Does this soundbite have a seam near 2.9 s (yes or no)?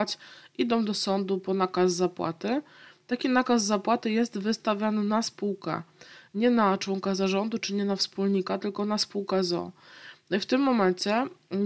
no